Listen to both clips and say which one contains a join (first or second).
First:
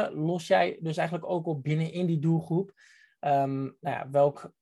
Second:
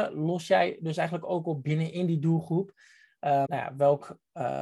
second